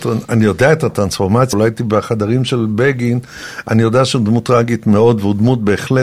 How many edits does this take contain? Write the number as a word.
one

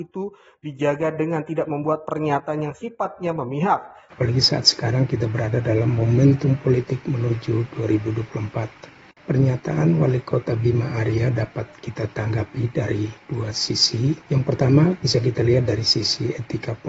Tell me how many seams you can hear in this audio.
two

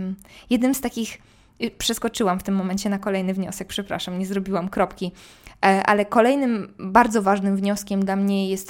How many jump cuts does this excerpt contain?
zero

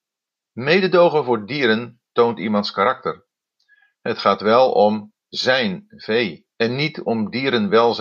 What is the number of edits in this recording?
one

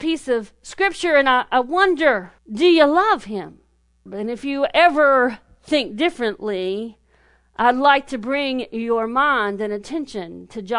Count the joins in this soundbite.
two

